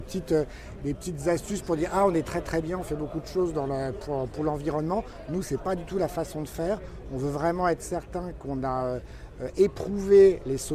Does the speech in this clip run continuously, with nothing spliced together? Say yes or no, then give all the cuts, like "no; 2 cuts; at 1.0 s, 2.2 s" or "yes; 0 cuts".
yes; 0 cuts